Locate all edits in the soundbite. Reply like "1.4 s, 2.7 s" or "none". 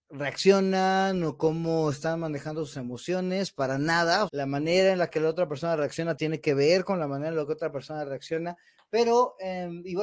4.3 s